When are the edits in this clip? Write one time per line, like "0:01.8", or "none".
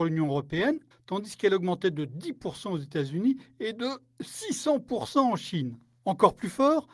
0:00.9